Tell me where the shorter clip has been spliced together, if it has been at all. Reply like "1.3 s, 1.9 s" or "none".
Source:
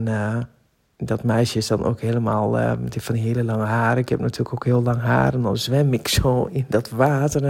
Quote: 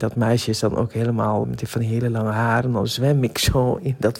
1.4 s, 2.6 s